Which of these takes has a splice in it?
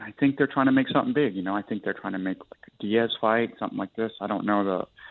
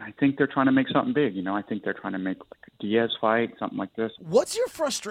second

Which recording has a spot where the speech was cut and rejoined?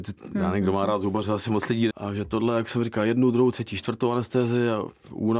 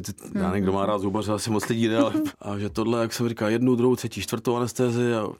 first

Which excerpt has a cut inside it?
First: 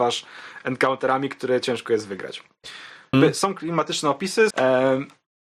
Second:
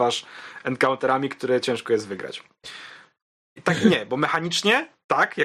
first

